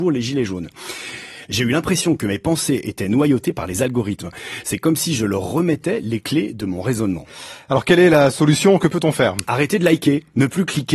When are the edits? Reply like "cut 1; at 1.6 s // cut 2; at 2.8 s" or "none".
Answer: cut 1; at 1.5 s

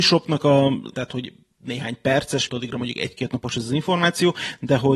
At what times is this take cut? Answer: cut 1; at 0.9 s // cut 2; at 2.5 s

